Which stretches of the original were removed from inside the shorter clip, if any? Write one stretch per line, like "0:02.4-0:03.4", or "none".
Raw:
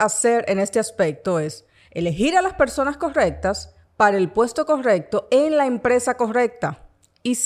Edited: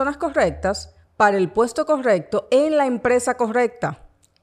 none